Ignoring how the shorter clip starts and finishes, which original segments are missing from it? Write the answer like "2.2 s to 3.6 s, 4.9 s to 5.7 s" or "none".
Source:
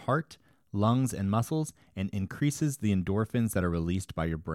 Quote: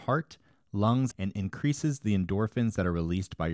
1.1 s to 1.9 s